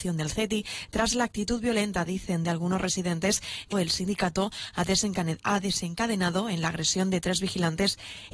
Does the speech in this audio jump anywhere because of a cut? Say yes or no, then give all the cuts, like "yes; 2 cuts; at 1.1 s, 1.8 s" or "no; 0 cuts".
yes; 1 cut; at 3.7 s